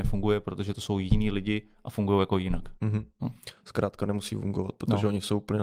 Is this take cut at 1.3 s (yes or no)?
no